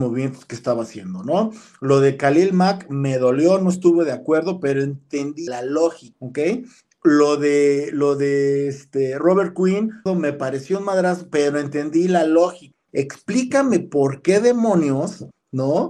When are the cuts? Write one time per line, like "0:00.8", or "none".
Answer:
0:10.1
0:12.9